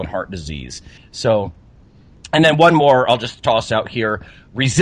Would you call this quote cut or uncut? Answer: cut